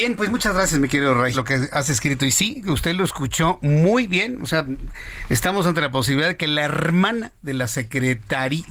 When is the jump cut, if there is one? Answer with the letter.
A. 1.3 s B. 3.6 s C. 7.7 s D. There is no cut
A